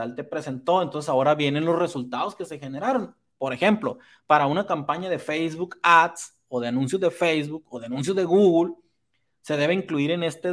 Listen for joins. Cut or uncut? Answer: uncut